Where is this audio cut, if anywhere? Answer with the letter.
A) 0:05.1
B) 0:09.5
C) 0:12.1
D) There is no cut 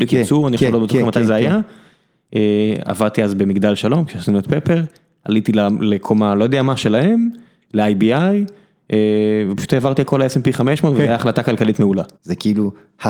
C